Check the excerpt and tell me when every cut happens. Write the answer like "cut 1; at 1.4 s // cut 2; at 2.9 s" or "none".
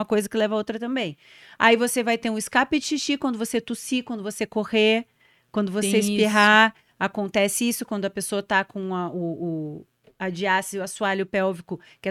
none